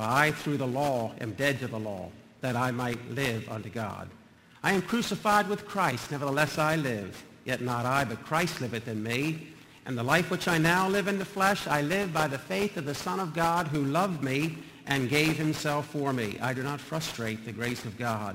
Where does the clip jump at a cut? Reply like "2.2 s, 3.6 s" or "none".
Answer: none